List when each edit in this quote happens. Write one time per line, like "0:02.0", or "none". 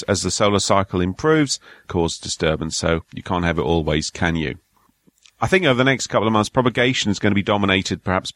0:01.8